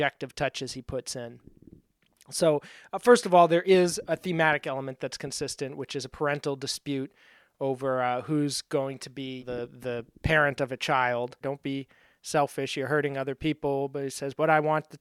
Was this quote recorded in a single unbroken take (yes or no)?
no